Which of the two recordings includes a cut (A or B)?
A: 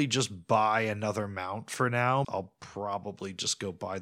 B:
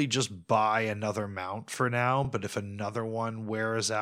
A